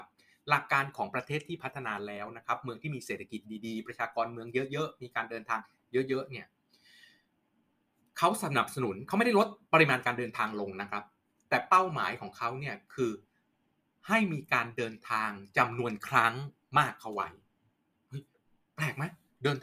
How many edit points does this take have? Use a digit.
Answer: 0